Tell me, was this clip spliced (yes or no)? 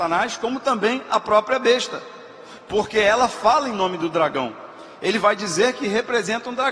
no